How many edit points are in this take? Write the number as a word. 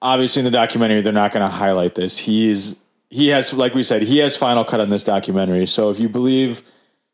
zero